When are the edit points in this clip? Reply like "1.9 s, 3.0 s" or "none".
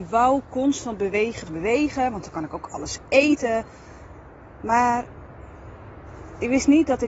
1.5 s